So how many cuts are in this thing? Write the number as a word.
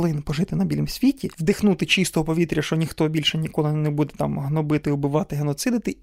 zero